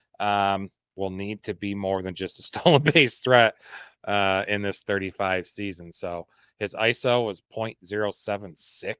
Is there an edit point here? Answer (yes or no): no